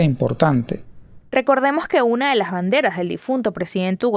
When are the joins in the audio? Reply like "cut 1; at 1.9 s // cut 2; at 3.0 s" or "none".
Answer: none